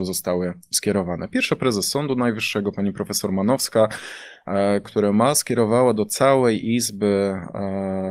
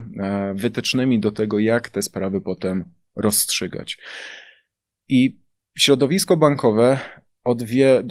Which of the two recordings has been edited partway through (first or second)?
first